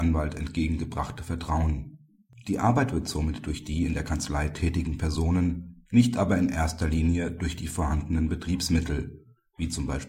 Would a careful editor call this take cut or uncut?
uncut